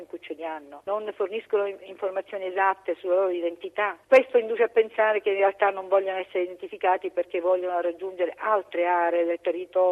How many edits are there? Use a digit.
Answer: 1